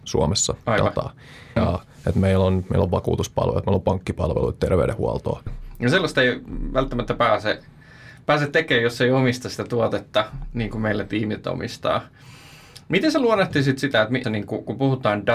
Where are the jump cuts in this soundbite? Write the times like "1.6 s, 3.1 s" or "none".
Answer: 1.6 s, 5.5 s, 14.2 s